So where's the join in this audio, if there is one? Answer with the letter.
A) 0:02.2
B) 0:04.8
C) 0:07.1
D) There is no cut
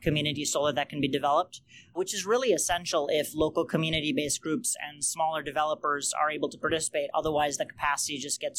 D